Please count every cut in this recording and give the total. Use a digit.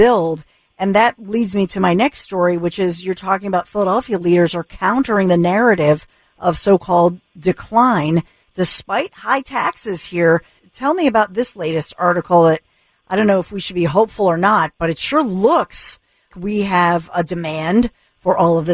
2